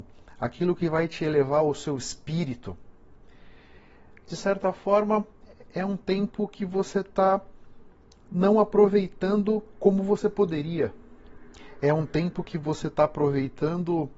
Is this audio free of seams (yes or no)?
yes